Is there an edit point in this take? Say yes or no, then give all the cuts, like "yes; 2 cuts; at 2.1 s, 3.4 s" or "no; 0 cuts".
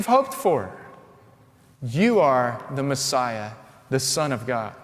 no; 0 cuts